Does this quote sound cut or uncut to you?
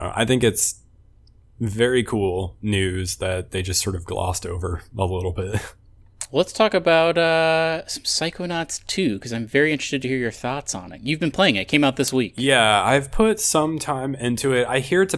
uncut